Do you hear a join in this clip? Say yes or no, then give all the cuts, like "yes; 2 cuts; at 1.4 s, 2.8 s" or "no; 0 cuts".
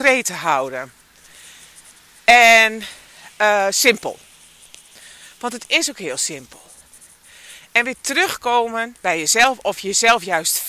no; 0 cuts